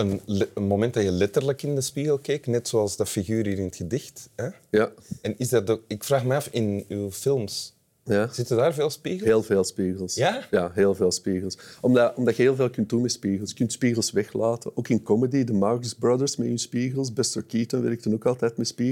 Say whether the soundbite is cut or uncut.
uncut